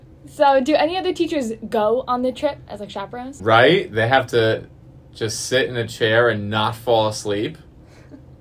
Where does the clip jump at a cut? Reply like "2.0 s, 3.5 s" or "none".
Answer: 3.4 s